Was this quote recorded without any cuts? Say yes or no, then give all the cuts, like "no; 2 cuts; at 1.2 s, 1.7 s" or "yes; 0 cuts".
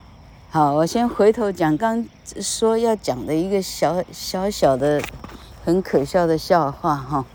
no; 1 cut; at 1.8 s